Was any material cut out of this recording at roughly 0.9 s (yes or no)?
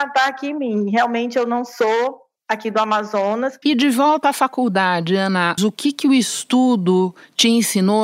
no